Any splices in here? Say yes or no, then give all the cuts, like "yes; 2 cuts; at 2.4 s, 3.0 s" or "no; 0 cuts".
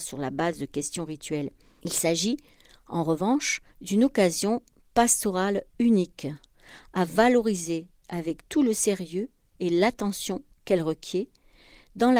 yes; 2 cuts; at 1.8 s, 3.7 s